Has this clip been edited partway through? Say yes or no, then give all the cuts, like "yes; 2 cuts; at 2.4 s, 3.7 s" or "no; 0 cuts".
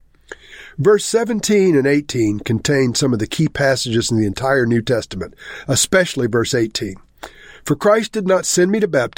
no; 0 cuts